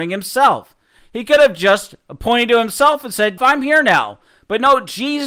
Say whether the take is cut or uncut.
cut